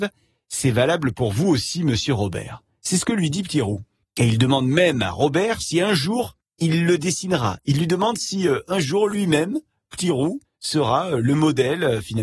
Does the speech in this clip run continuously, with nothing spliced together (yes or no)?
no